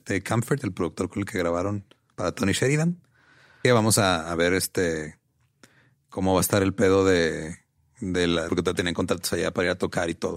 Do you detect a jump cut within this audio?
yes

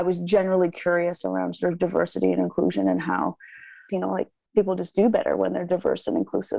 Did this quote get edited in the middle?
yes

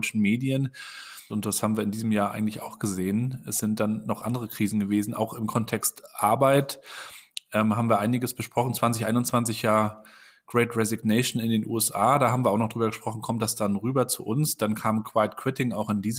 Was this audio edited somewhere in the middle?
yes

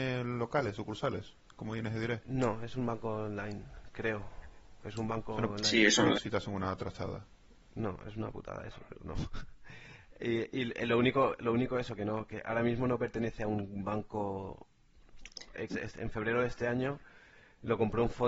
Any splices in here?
yes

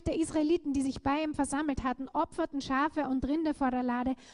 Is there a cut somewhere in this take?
no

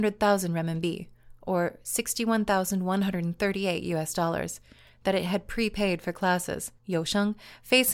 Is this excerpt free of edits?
no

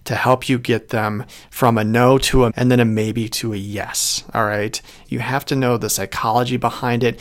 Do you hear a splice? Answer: yes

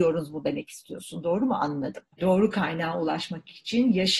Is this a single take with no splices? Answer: no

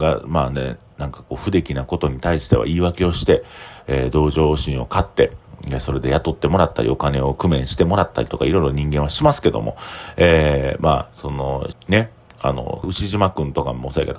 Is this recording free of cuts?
no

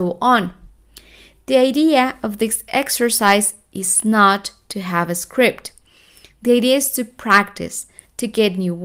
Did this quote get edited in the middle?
no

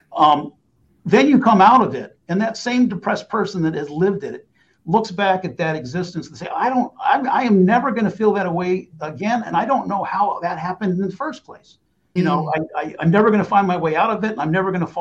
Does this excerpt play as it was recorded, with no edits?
no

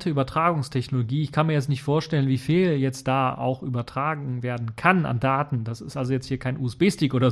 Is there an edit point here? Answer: no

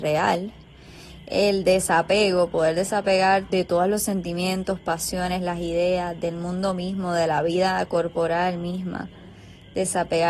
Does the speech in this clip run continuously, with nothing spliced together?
no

